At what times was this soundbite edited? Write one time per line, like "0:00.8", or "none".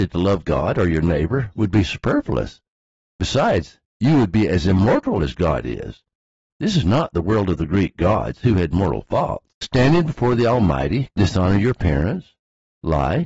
0:06.5
0:09.5
0:11.1